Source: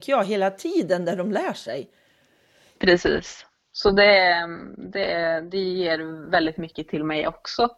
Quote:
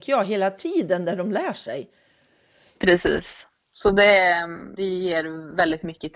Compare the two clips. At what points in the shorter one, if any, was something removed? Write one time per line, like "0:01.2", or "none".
0:04.8